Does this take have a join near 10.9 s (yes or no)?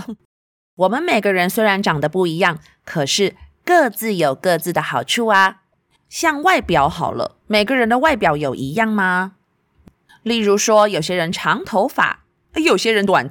no